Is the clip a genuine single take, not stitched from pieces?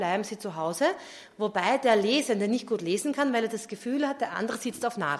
yes; 0 cuts

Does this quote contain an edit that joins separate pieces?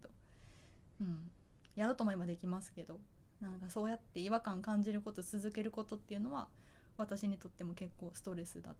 yes; 1 cut; at 0.9 s

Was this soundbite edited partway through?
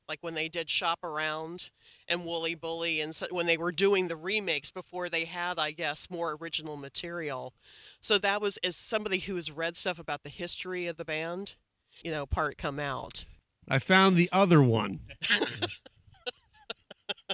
yes; 2 cuts; at 12.0 s, 13.5 s

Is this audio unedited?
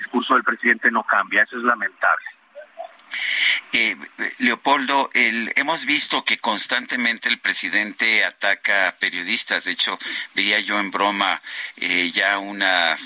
yes; 0 cuts

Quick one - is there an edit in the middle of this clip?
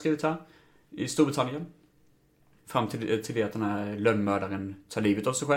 yes; 1 cut; at 2.6 s

